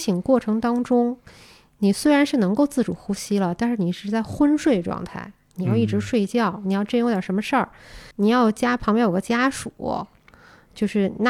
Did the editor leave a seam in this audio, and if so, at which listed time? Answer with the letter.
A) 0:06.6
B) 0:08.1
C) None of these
B